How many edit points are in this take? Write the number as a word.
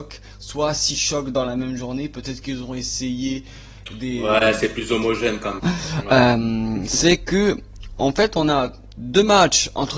one